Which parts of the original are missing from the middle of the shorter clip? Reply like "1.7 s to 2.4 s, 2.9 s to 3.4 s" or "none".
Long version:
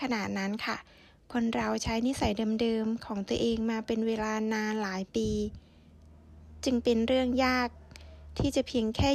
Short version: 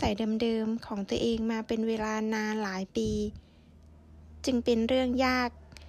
none